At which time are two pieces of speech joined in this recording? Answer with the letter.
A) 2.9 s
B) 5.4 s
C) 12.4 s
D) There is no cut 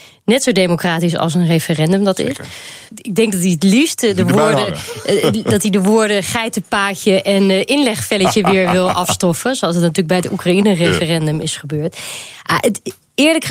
A